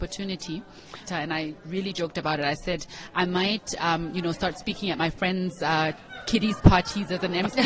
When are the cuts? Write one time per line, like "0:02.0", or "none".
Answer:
0:01.1